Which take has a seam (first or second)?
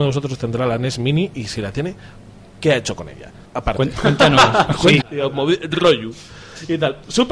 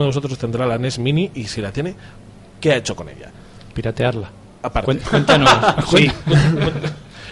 first